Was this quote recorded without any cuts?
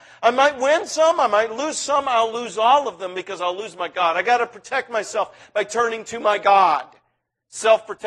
yes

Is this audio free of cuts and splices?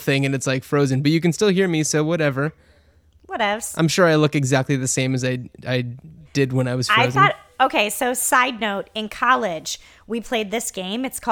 yes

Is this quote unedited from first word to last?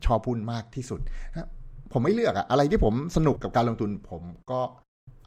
no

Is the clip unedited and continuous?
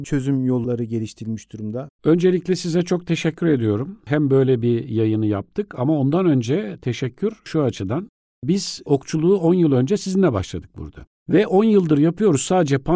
no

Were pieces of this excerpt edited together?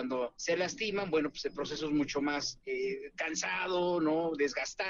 no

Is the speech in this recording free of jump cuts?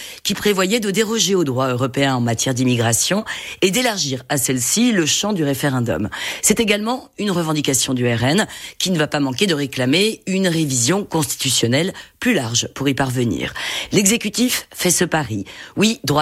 yes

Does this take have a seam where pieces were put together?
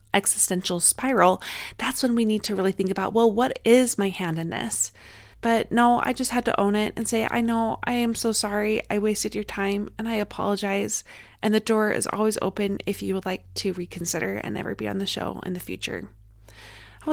yes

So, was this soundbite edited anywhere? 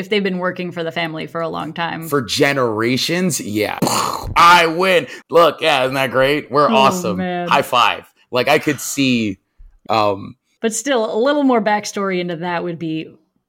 yes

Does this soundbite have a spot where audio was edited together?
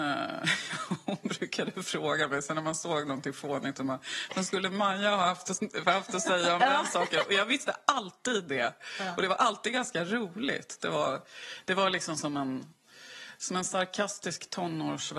yes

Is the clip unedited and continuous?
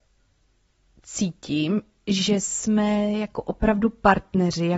yes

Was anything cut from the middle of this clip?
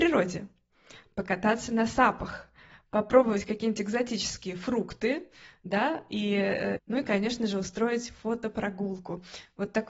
yes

